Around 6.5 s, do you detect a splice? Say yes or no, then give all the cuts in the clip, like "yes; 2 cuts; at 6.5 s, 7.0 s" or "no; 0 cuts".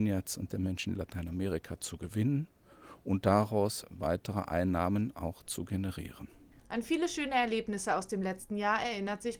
no; 0 cuts